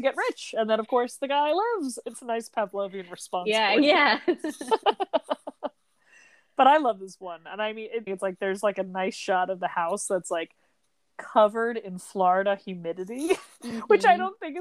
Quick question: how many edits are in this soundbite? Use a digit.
2